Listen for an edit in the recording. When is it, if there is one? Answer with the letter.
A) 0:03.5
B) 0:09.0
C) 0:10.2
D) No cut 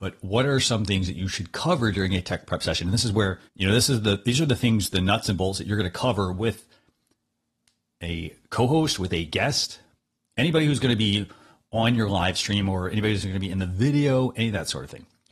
A